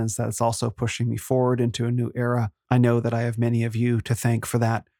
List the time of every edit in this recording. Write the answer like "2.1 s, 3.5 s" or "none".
2.6 s